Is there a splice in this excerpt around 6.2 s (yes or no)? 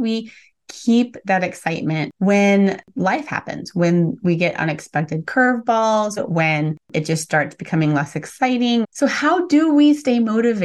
yes